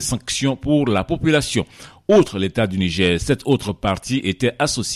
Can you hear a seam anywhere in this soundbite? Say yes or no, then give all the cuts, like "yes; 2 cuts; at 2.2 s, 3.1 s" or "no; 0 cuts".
no; 0 cuts